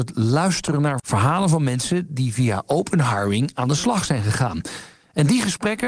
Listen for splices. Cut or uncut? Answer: cut